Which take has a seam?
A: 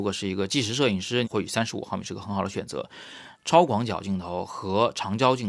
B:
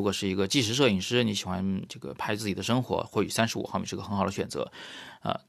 A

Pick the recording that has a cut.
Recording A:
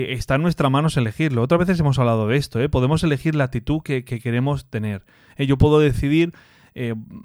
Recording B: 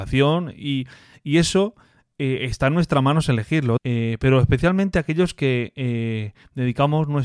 B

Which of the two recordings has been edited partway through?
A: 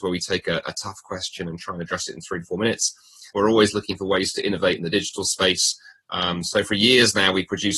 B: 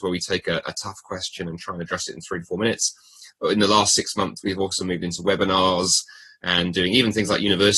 A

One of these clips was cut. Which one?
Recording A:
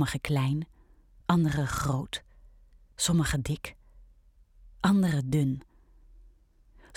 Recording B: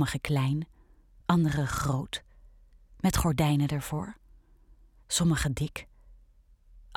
A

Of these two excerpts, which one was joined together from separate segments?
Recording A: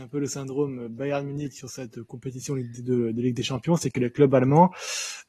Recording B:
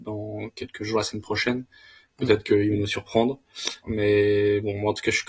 B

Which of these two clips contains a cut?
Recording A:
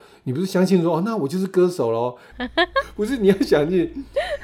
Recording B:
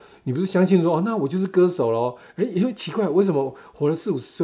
A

